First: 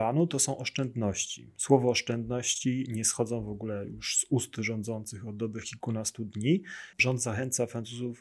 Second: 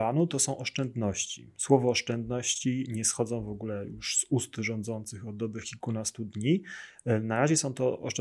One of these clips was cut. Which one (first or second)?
first